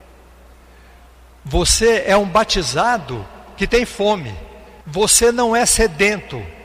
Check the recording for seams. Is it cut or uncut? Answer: cut